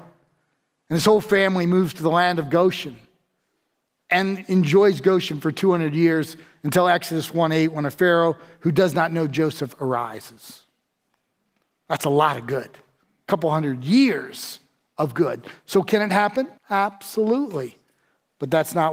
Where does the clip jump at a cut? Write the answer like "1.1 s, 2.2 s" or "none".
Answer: 16.6 s